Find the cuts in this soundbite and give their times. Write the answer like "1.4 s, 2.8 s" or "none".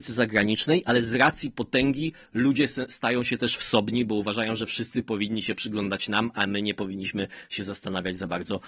none

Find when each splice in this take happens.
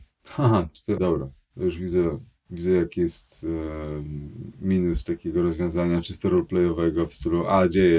1.0 s

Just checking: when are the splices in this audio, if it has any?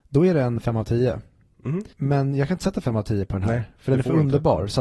1.9 s

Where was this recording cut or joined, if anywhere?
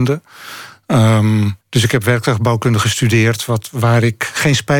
1.6 s

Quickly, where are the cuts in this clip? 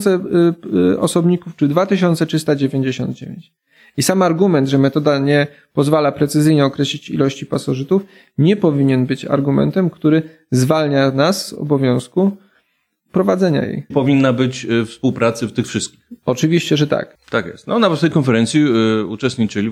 13.9 s, 17.1 s

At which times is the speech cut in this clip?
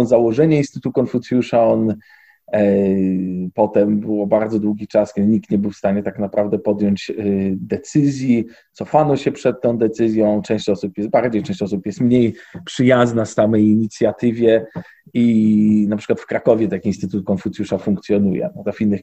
none

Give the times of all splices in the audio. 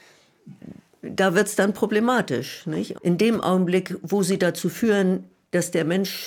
2.9 s

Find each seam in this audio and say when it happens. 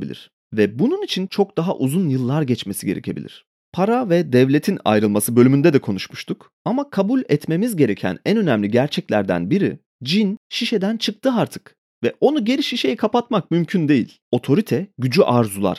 1.3 s, 6.5 s, 14.2 s

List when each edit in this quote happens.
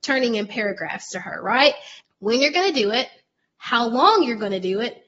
2.0 s

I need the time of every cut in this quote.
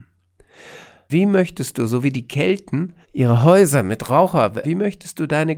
1.1 s, 3.0 s, 4.6 s

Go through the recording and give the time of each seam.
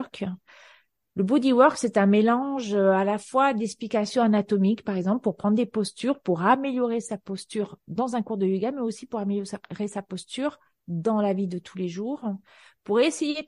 none

